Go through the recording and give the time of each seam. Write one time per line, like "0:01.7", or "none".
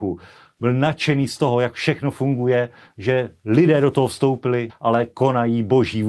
0:04.7